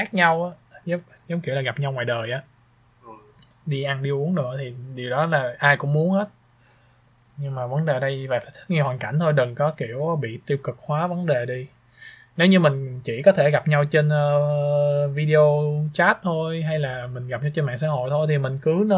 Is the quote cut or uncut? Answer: uncut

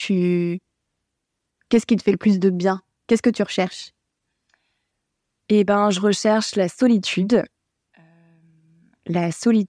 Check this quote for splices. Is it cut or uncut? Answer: uncut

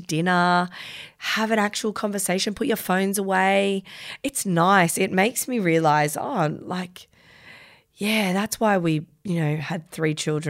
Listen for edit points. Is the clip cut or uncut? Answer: uncut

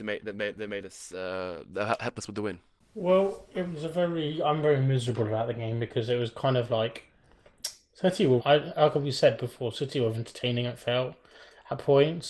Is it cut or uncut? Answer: cut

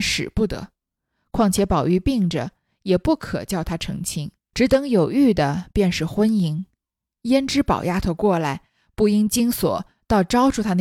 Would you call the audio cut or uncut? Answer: cut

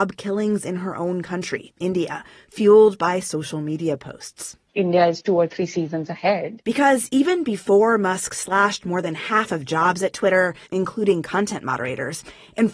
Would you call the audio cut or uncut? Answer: cut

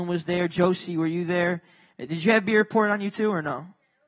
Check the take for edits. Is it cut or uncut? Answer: uncut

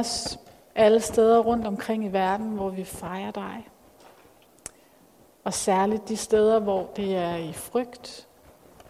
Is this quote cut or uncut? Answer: uncut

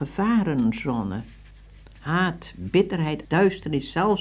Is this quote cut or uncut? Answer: cut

